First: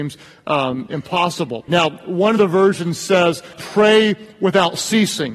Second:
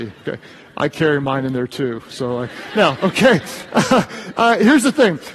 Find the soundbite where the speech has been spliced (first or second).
first